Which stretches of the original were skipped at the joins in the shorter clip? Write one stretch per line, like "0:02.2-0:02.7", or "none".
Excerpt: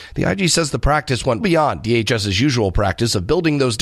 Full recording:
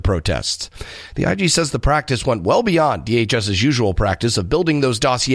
0:02.4-0:02.6

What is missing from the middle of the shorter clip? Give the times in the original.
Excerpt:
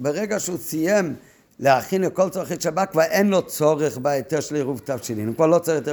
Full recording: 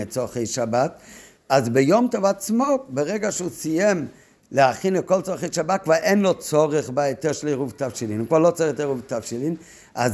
none

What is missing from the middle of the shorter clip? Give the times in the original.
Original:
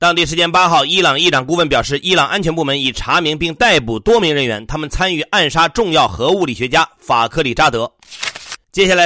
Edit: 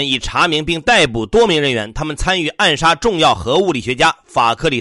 none

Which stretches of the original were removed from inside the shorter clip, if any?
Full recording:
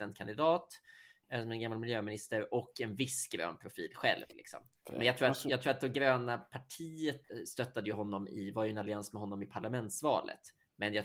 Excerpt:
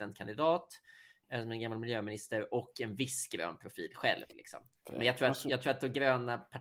none

